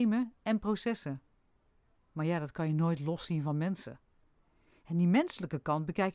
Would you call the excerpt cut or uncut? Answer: uncut